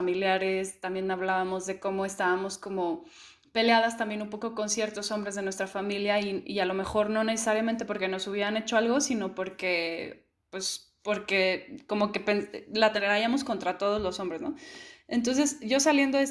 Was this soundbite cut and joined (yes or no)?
no